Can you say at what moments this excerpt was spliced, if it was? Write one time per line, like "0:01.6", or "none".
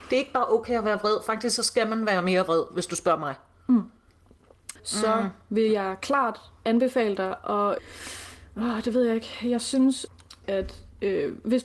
0:04.8
0:10.4